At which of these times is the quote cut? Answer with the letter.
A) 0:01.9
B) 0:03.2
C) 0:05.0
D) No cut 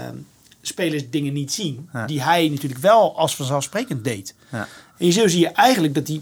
C